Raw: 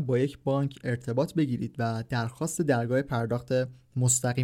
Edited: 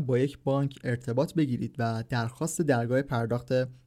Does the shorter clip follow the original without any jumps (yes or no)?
yes